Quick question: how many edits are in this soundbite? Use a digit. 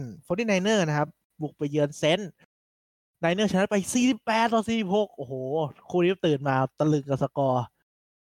0